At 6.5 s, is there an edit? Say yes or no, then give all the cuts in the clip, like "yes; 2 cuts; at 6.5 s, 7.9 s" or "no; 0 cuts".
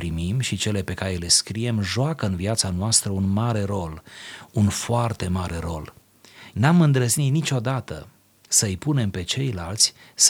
yes; 1 cut; at 6.5 s